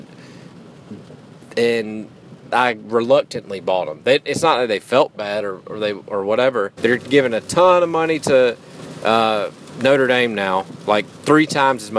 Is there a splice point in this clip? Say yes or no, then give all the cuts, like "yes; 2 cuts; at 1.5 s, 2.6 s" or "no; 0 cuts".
yes; 1 cut; at 6.8 s